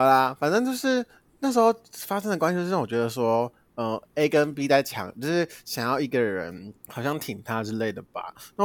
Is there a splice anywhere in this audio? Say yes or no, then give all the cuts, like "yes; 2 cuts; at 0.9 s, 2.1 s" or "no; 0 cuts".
yes; 1 cut; at 6.8 s